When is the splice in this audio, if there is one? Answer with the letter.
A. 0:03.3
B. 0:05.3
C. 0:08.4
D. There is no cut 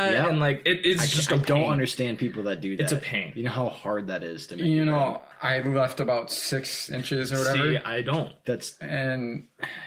B